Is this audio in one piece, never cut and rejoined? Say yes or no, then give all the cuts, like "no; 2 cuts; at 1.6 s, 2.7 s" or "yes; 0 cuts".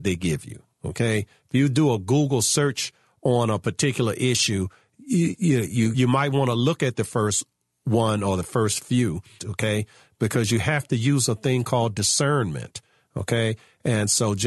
no; 2 cuts; at 5.9 s, 9.4 s